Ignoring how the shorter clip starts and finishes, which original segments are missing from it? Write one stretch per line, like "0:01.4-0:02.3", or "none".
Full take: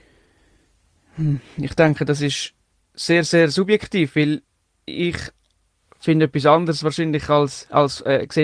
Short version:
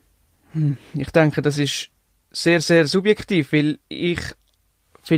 0:04.5-0:04.8